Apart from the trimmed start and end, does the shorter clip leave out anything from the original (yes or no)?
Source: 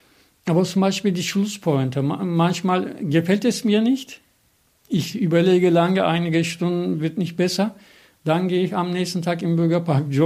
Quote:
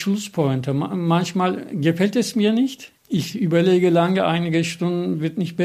yes